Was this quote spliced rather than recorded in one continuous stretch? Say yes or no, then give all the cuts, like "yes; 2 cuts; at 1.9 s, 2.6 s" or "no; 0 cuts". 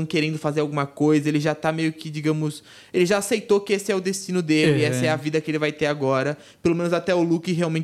no; 0 cuts